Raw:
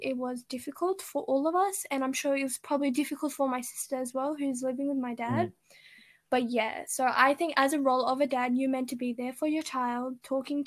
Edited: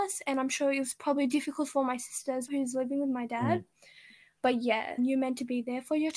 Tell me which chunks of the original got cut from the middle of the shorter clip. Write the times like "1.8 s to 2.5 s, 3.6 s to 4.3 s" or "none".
4.1 s to 4.4 s, 6.9 s to 8.5 s

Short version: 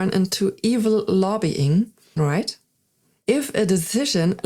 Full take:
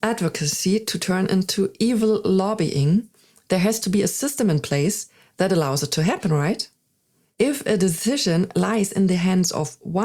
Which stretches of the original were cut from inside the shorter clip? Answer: 3.3 s to 6.3 s

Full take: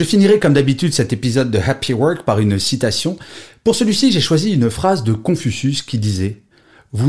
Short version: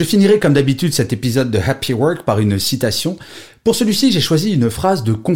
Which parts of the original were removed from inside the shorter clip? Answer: none

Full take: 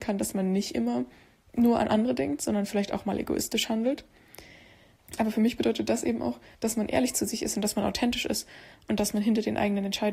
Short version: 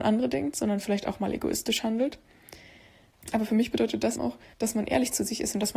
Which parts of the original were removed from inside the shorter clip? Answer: 6.0 s to 6.2 s

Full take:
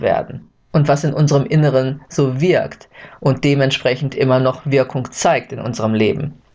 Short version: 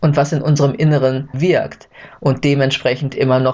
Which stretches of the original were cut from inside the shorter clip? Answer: 2.1 s to 2.3 s

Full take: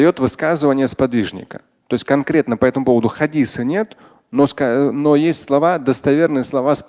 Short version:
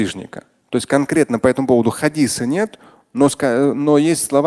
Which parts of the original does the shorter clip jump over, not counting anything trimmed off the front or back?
none

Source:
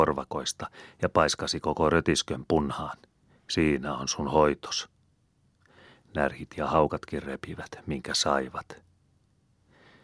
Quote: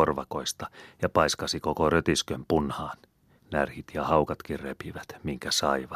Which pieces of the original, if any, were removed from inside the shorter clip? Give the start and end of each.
3.4 s to 6.0 s

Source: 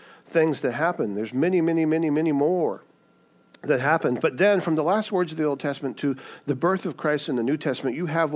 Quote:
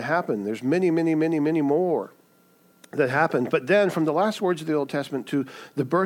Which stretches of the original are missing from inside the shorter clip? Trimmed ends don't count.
none

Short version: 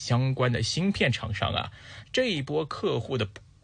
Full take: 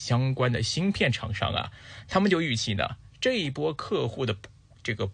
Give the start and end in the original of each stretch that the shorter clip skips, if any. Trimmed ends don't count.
2.0 s to 3.1 s

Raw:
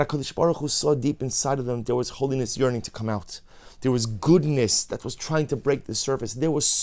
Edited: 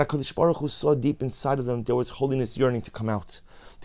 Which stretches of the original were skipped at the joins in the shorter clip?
none

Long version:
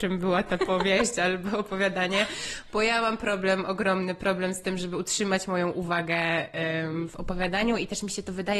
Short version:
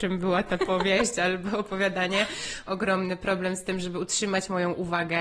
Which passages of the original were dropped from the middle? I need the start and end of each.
2.7 s to 3.6 s

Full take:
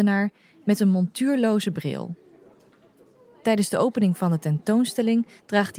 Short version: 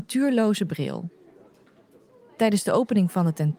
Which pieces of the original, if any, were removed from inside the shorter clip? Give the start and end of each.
none

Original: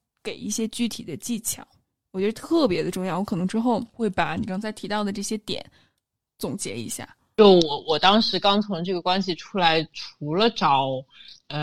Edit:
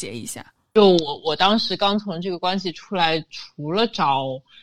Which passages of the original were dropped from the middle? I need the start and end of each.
none

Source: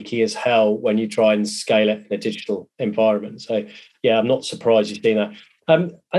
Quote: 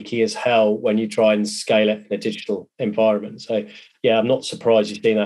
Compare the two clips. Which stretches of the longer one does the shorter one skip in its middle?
none

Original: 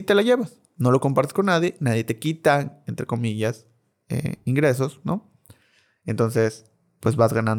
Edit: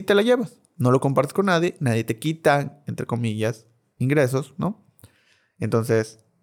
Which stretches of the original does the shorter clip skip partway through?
4.0 s to 4.4 s

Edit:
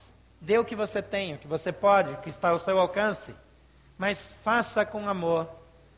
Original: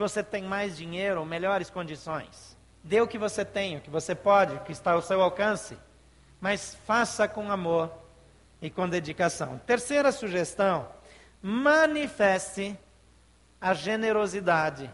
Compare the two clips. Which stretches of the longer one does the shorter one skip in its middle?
none

